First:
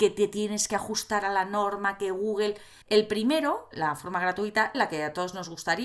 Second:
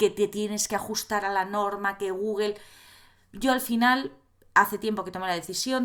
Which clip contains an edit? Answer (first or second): first